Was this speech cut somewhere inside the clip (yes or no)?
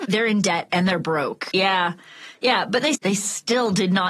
yes